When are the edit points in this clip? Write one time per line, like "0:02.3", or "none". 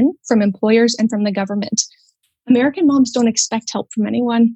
none